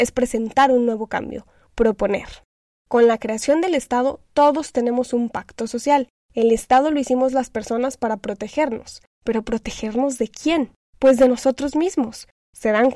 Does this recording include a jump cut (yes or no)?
yes